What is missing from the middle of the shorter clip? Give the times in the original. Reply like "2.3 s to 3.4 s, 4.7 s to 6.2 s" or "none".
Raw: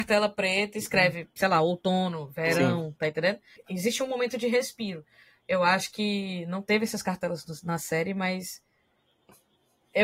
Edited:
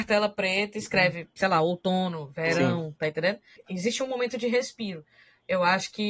none